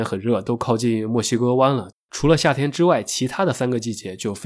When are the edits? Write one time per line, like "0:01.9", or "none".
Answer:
0:01.9